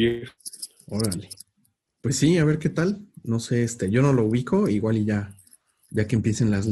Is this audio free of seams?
yes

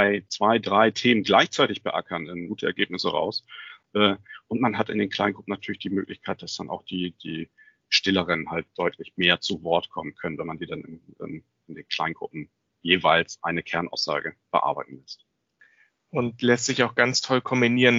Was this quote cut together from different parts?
yes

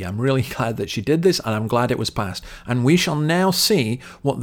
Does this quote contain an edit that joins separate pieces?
no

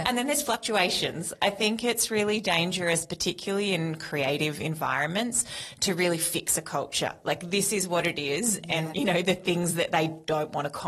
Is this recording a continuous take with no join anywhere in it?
no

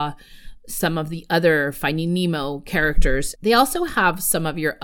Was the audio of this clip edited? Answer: yes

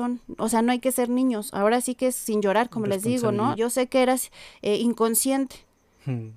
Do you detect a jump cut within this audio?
yes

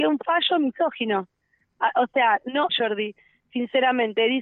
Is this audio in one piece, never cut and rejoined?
no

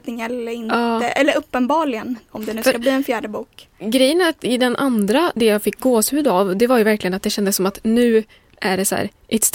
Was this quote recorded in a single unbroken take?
no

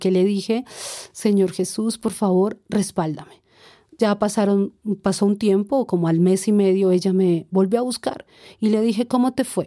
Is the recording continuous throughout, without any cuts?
yes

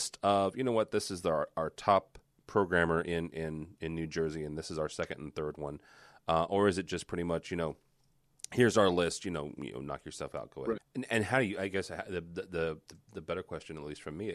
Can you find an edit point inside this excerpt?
yes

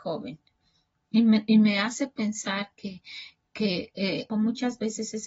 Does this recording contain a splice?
yes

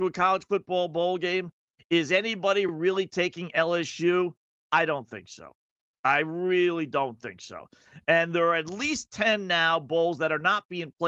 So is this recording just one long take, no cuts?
yes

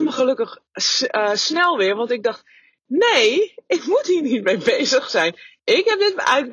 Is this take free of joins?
yes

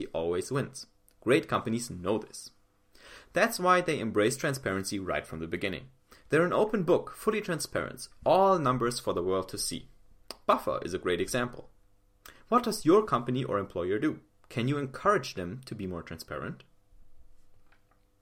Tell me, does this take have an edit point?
no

